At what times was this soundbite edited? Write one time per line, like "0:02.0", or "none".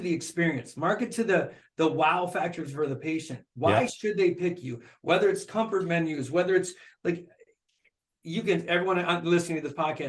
none